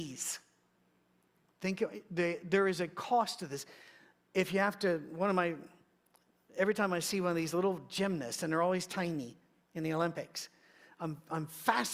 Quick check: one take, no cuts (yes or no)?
yes